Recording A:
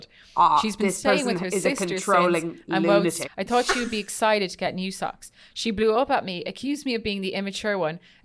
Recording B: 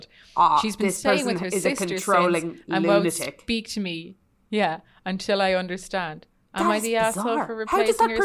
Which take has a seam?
A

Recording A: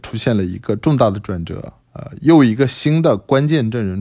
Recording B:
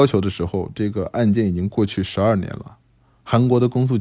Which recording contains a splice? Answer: A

